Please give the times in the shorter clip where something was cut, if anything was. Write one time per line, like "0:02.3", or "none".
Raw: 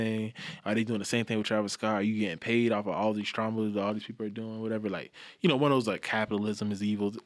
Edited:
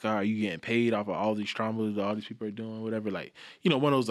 none